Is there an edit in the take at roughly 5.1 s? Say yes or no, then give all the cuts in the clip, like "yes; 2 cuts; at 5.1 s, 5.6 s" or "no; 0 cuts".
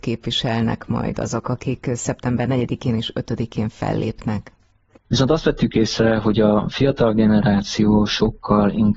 yes; 1 cut; at 5.1 s